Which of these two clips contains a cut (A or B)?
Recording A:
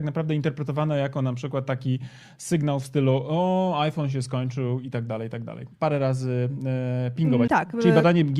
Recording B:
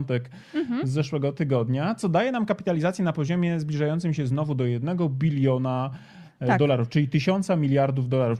A